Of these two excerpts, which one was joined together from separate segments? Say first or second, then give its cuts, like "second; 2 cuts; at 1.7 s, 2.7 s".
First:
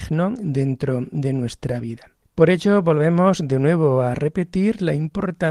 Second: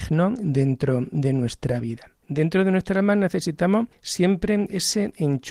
second; 1 cut; at 2.2 s